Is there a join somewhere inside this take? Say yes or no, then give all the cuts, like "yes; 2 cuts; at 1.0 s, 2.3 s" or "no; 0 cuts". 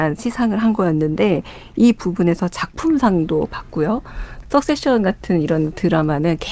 yes; 1 cut; at 4.4 s